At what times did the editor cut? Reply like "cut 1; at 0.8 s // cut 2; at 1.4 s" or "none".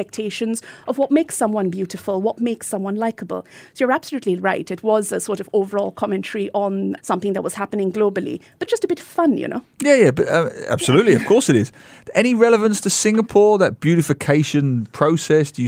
cut 1; at 8.7 s